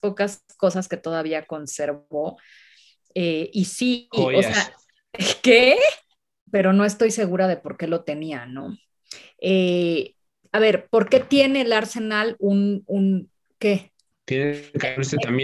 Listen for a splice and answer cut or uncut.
cut